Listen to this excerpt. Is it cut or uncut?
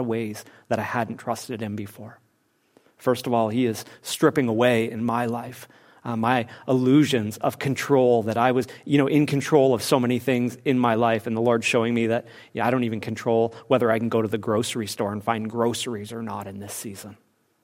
uncut